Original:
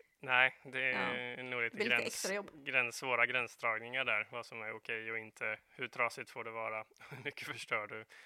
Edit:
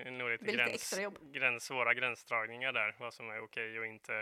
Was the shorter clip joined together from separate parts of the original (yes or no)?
no